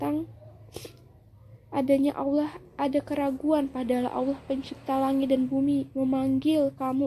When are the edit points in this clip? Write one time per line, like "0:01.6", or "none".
none